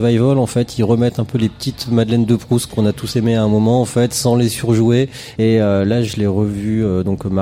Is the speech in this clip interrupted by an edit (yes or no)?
yes